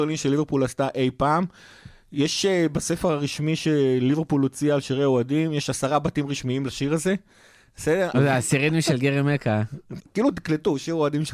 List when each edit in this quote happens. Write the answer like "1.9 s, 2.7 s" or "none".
8.1 s, 10.0 s